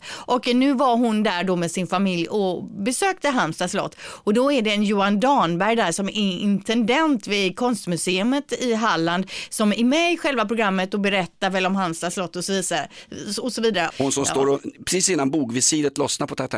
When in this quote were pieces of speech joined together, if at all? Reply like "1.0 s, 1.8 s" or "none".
13.9 s